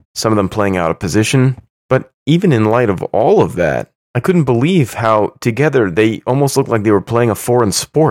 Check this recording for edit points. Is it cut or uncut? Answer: uncut